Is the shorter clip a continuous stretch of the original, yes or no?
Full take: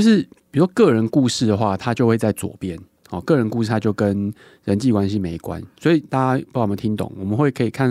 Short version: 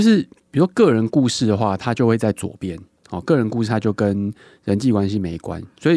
yes